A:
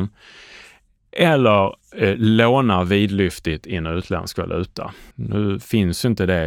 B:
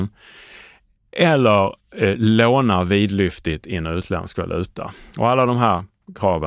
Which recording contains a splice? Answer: A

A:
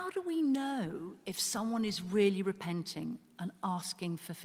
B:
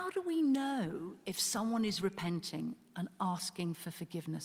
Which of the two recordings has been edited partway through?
B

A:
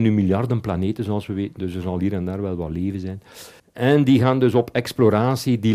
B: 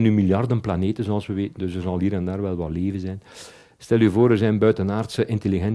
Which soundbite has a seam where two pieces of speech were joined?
A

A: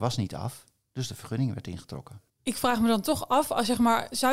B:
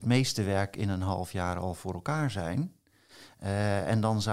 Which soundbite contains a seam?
A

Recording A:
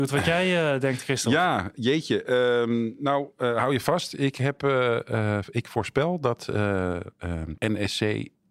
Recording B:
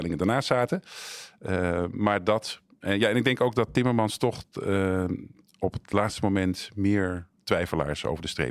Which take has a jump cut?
A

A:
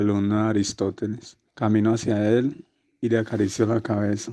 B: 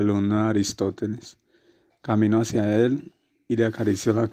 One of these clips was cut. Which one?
A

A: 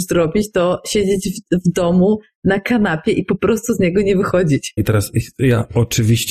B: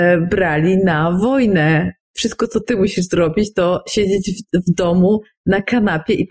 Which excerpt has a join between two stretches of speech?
A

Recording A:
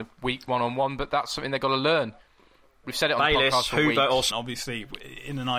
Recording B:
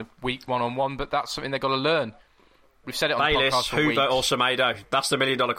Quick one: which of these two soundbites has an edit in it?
A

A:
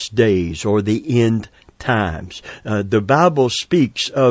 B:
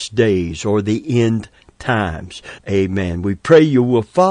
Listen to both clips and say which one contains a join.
B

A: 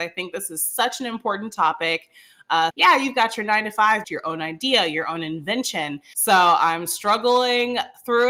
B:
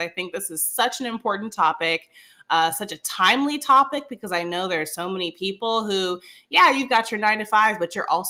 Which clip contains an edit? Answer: A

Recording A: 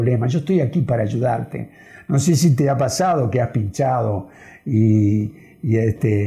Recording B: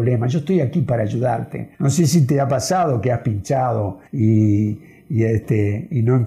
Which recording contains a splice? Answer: B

